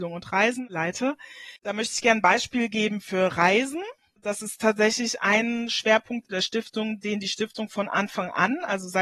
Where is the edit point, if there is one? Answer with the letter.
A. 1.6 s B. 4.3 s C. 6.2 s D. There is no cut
C